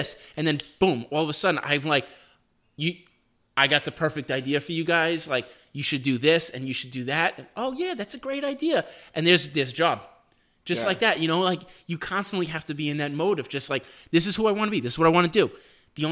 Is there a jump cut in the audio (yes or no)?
no